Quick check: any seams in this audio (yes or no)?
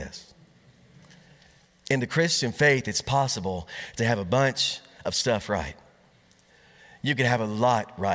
no